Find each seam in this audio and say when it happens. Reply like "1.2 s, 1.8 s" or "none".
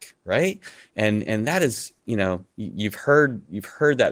none